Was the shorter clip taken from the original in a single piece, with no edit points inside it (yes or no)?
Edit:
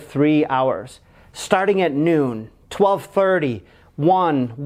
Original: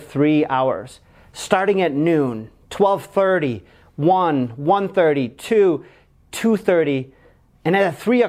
yes